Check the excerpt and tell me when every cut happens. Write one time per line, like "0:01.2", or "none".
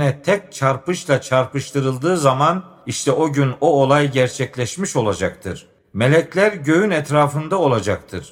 0:05.8

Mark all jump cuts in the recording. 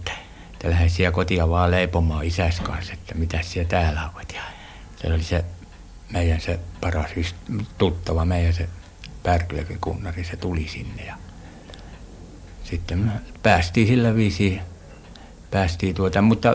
none

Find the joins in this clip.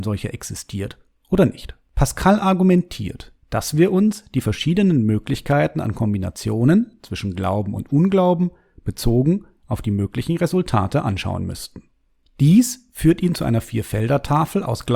0:01.9
0:03.4

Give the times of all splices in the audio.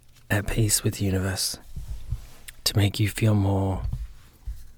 none

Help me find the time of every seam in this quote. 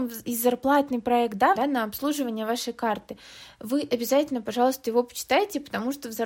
0:01.6

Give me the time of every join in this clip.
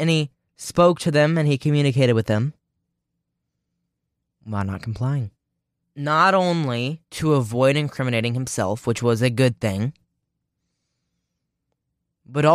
0:05.8
0:07.1

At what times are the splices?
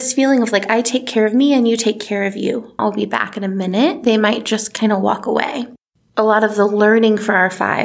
0:02.8

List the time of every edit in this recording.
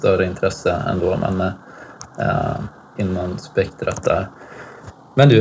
0:03.0

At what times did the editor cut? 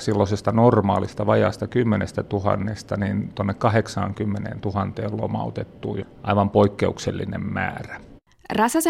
0:06.0

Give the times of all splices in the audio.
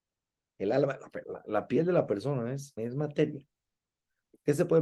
0:01.2
0:02.8

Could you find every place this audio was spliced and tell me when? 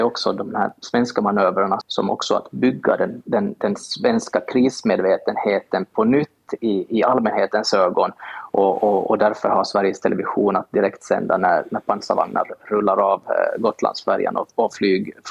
0:01.8

